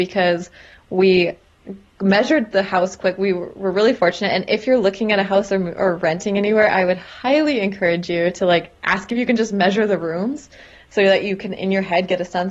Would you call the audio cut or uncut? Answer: uncut